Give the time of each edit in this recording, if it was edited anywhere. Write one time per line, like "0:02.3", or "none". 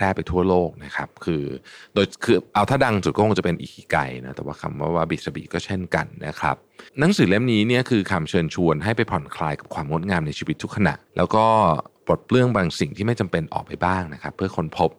0:06.9
0:11.1